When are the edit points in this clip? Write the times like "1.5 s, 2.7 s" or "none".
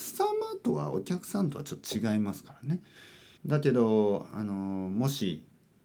3.4 s